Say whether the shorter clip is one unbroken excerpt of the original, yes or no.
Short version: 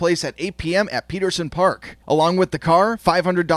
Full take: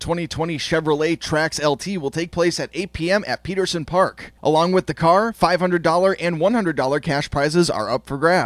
yes